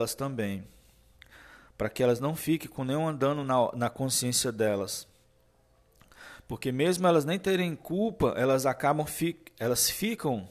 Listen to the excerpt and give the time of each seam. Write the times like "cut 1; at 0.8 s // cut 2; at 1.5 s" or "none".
none